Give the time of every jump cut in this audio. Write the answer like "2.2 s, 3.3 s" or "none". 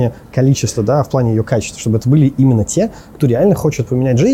none